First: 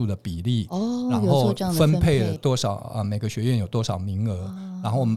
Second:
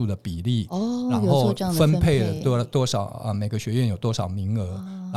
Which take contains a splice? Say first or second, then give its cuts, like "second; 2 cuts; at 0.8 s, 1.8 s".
first; 1 cut; at 2.4 s